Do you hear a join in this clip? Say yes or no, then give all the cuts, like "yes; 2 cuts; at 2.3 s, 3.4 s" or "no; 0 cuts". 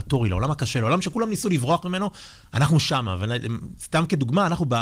no; 0 cuts